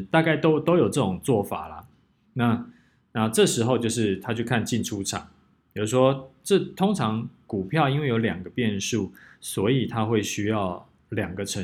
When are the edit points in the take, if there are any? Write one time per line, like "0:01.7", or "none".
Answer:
none